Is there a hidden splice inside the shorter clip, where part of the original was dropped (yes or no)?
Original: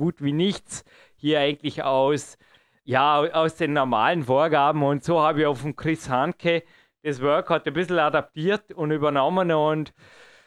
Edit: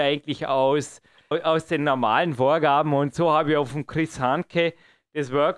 yes